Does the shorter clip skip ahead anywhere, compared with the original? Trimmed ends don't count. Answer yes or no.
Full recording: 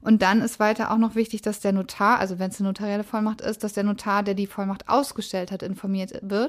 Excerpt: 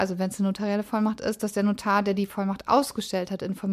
no